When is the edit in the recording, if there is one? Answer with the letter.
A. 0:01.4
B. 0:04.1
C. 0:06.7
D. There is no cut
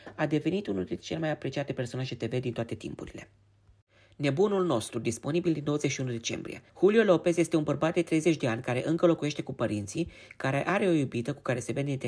C